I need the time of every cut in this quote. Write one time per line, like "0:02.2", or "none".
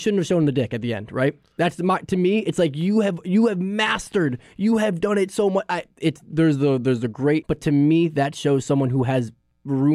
0:07.4